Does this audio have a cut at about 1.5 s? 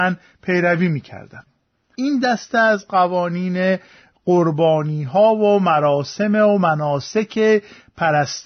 no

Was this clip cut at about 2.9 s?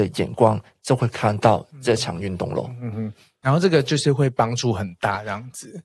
yes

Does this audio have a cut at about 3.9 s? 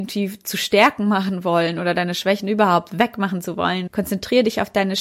yes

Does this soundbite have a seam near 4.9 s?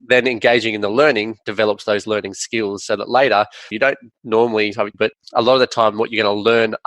yes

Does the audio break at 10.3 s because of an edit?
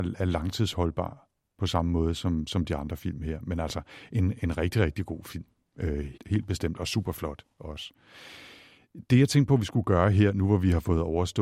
no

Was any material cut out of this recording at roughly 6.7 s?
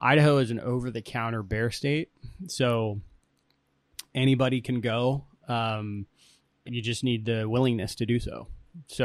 yes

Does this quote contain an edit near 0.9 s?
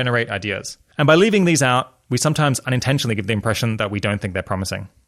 yes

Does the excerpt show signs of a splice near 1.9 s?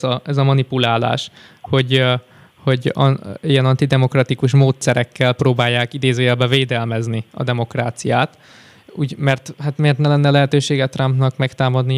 no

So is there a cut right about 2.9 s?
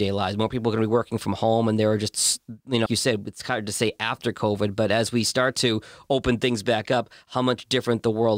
yes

